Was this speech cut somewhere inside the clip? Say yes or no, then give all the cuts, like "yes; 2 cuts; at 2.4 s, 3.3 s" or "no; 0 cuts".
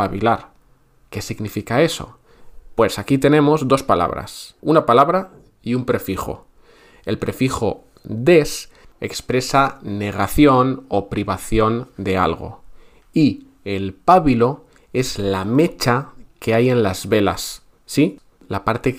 yes; 1 cut; at 4.6 s